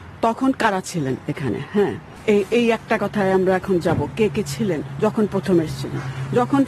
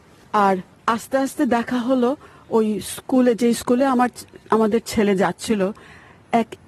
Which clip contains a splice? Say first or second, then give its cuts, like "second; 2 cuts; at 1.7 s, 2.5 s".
first; 1 cut; at 2.5 s